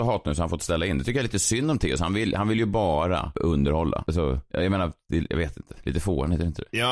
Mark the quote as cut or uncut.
uncut